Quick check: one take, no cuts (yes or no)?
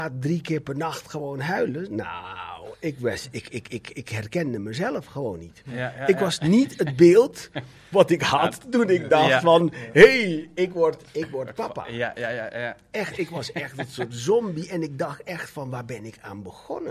yes